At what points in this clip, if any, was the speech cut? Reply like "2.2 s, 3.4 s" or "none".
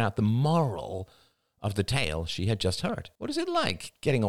3.2 s